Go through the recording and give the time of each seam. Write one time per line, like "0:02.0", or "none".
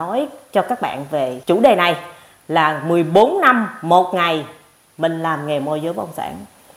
0:01.4